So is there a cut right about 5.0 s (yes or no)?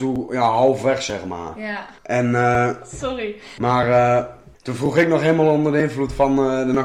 no